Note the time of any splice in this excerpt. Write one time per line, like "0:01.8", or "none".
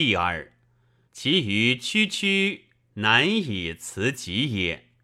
0:01.1